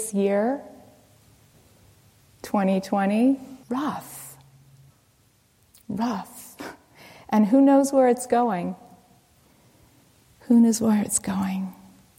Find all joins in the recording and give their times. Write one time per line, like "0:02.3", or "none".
0:03.6